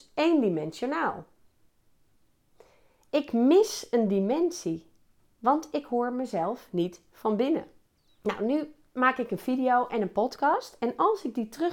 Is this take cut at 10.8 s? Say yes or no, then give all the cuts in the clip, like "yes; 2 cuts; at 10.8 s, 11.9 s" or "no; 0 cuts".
no; 1 cut; at 8.1 s